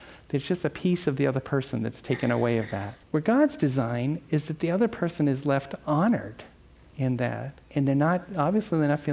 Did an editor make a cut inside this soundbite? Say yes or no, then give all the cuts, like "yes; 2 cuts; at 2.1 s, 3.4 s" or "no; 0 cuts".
yes; 2 cuts; at 3.0 s, 7.6 s